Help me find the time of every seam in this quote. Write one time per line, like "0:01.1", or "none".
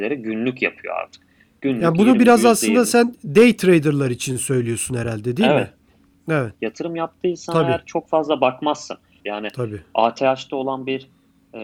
0:06.5
0:09.2